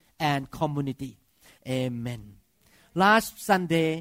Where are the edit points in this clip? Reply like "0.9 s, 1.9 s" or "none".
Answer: 1.6 s